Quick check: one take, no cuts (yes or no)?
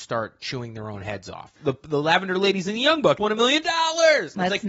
no